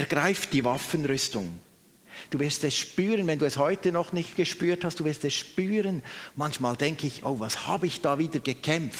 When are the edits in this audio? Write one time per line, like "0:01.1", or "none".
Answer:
0:02.3
0:06.3